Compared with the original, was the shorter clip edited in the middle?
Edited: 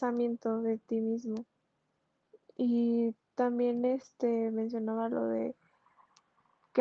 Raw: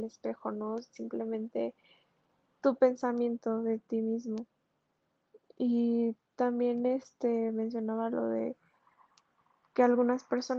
no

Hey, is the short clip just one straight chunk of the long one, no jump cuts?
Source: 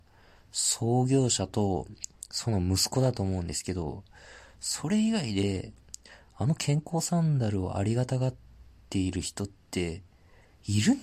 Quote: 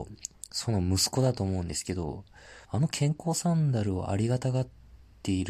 no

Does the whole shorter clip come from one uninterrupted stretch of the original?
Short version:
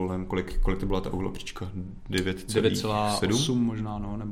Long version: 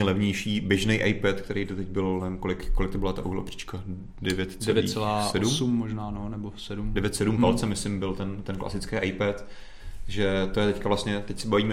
yes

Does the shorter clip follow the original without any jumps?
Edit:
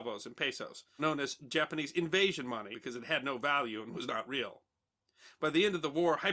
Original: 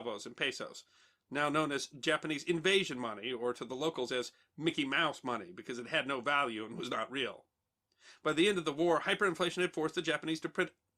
no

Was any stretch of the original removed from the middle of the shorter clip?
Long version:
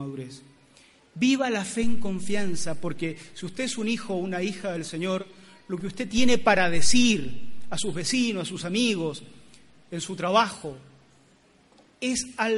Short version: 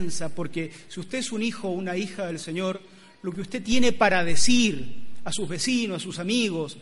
no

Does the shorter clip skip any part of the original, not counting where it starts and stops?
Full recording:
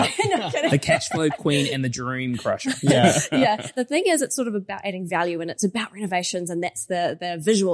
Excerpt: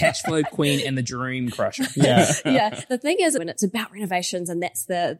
yes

